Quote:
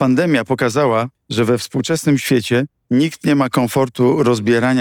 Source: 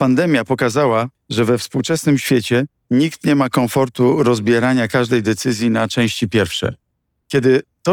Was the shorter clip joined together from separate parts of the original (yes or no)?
no